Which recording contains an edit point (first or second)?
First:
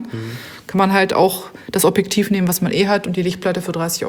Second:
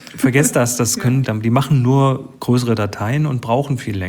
second